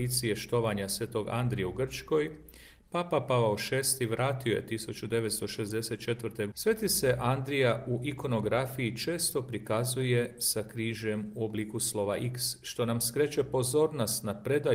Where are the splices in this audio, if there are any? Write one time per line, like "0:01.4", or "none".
0:06.5